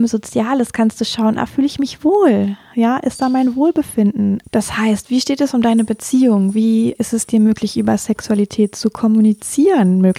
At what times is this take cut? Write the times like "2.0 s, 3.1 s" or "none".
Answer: 4.4 s, 7.0 s